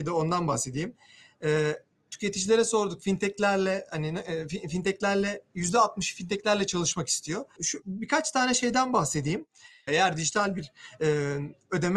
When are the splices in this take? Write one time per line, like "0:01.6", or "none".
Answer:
0:07.6
0:09.9